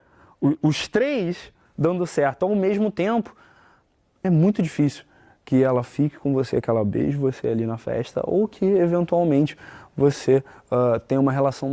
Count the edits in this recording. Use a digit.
0